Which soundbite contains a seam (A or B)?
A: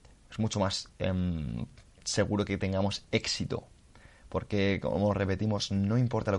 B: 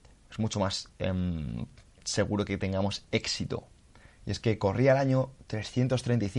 B